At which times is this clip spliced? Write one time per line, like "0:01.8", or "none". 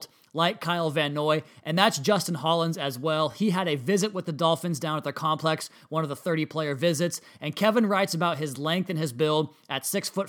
none